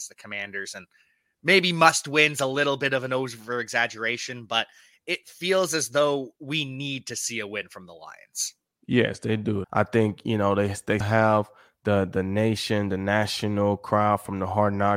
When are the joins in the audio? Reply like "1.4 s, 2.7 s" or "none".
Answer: 9.6 s, 11.0 s